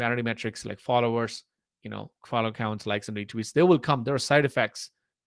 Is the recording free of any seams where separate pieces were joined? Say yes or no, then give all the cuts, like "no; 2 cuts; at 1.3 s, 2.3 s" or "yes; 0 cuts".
yes; 0 cuts